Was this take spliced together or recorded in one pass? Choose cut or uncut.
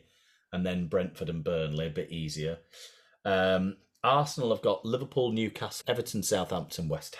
cut